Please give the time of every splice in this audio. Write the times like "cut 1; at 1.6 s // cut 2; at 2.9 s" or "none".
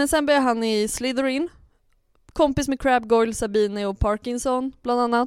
none